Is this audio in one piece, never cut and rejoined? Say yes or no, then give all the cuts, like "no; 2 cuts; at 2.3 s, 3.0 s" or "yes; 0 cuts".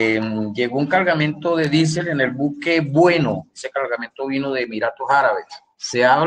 yes; 0 cuts